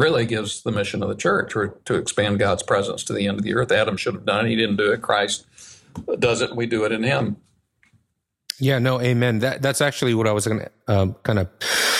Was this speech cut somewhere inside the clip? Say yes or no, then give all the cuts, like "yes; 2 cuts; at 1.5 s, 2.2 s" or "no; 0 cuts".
no; 0 cuts